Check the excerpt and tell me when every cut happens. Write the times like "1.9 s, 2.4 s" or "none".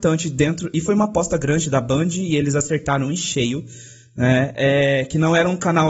none